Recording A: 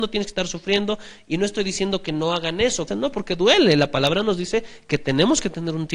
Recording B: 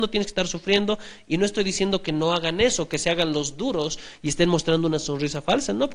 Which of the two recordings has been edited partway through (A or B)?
A